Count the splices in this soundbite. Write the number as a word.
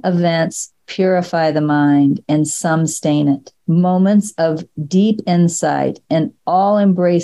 one